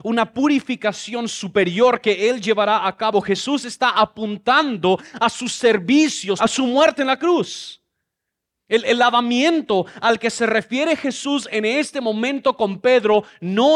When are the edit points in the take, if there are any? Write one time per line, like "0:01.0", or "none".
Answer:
0:06.4